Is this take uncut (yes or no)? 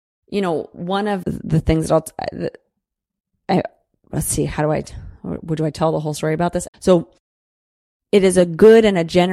no